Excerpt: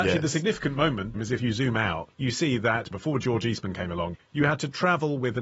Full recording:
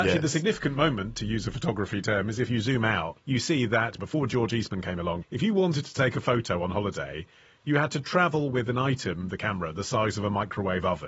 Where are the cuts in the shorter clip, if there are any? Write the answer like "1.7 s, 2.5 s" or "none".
1.1 s, 4.2 s